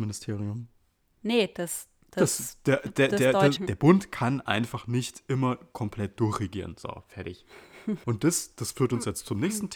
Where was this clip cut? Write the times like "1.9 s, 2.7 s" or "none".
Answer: 3.6 s, 8.0 s

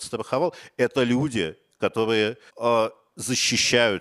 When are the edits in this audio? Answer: 2.5 s

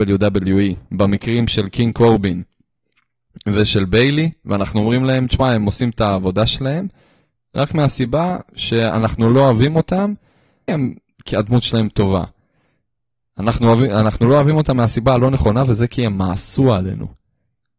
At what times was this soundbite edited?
10.7 s

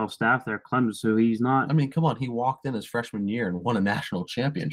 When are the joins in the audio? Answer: none

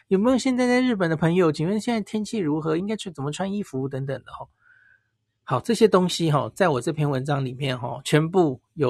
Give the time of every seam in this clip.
none

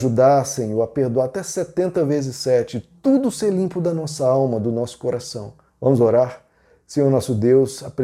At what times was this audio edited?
5.7 s

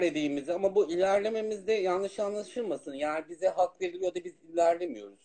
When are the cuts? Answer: none

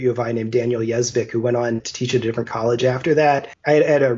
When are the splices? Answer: 1.8 s

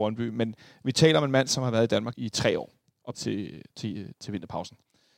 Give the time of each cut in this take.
2.1 s, 3.1 s

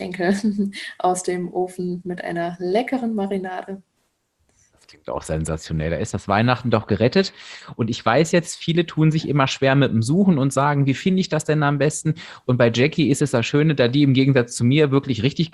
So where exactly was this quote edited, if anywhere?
none

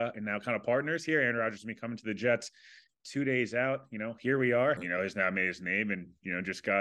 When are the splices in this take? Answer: 2.9 s, 4.8 s

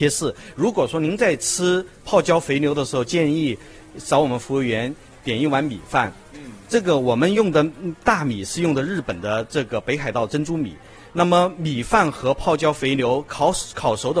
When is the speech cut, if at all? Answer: none

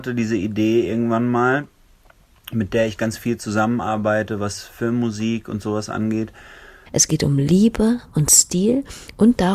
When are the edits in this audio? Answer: 6.9 s

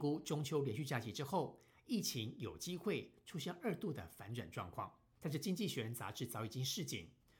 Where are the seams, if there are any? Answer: 5.2 s

